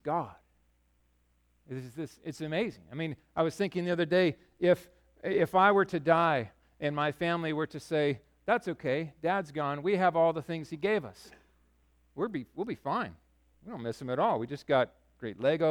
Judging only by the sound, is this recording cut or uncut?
uncut